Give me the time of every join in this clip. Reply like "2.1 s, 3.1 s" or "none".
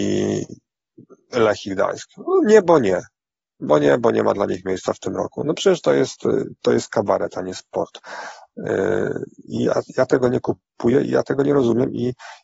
none